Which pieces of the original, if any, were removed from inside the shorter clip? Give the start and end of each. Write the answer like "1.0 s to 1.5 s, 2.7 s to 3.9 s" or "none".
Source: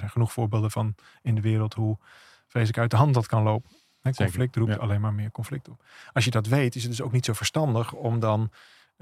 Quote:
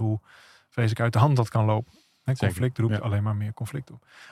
none